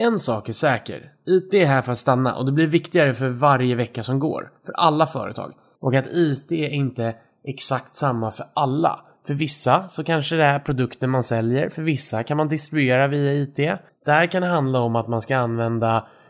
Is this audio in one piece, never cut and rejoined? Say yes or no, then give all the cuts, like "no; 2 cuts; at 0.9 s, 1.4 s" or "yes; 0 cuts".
no; 2 cuts; at 5.7 s, 13.9 s